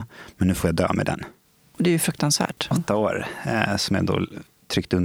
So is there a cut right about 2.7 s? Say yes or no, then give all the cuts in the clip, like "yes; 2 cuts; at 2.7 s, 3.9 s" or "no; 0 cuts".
yes; 1 cut; at 2.7 s